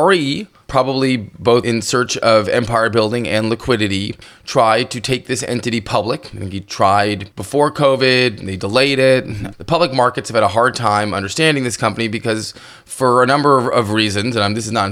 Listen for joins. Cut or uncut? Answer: uncut